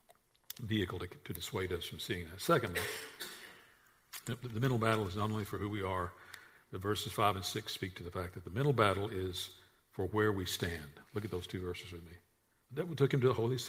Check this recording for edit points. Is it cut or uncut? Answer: uncut